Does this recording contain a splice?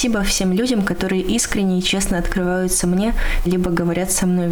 yes; 1 cut; at 3.4 s

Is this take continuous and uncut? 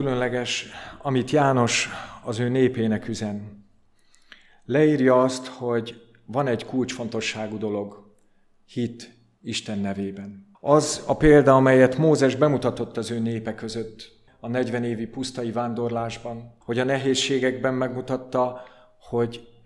no; 3 cuts; at 10.5 s, 14.3 s, 16.6 s

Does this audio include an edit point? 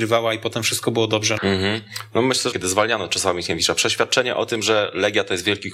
yes; 2 cuts; at 1.4 s, 2.5 s

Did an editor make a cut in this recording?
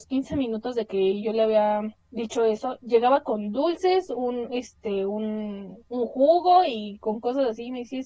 yes; 1 cut; at 5.9 s

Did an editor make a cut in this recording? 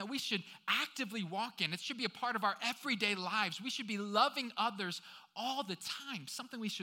no; 0 cuts

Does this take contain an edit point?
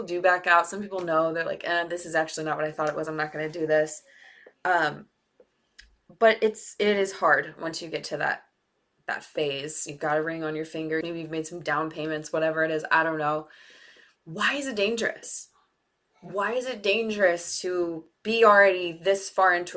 yes; 1 cut; at 11.0 s

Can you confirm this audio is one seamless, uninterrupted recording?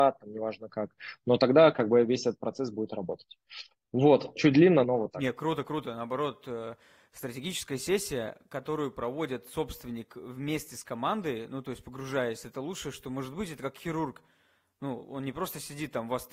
no; 1 cut; at 4.8 s

